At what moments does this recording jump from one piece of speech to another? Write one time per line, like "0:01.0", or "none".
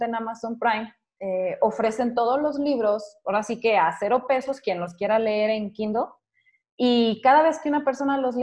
none